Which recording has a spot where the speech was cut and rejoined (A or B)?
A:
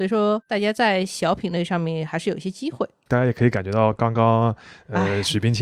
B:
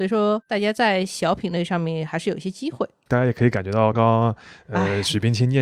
B